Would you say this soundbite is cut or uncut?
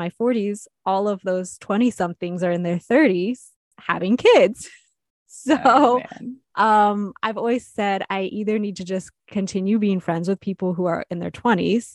uncut